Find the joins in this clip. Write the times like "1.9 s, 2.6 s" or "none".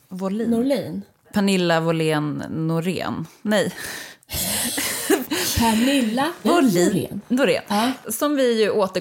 5.3 s, 6.4 s